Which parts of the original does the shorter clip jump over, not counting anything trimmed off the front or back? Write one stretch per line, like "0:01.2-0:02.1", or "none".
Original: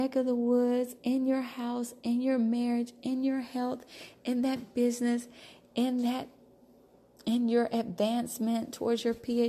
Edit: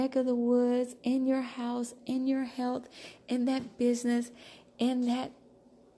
0:02.0-0:02.9